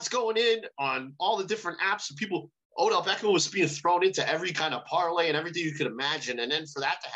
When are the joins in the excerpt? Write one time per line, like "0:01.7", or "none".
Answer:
none